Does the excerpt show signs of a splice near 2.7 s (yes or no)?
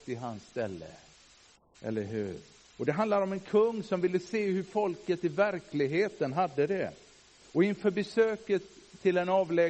yes